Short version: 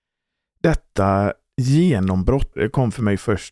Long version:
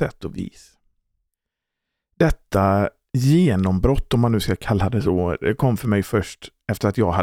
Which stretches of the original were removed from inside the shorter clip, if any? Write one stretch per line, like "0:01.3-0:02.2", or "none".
0:04.1-0:05.4